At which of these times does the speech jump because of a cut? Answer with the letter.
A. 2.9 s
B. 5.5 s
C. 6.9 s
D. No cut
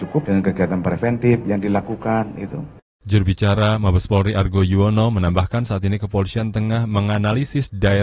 D